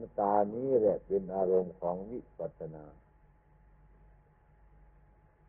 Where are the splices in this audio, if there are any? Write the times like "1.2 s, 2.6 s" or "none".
2.5 s